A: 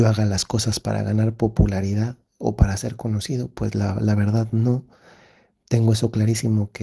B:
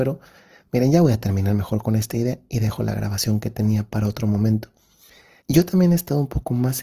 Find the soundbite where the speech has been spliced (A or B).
B